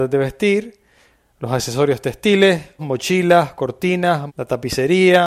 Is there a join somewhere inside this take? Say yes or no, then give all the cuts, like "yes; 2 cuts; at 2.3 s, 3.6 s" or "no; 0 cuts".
yes; 2 cuts; at 2.8 s, 4.3 s